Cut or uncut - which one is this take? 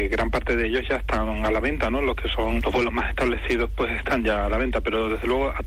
uncut